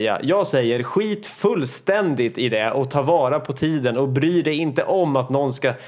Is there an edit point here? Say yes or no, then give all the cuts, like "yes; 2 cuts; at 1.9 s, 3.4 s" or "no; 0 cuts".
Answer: no; 0 cuts